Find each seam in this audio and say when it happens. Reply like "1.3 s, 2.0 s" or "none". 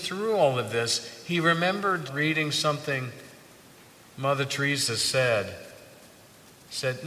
2.1 s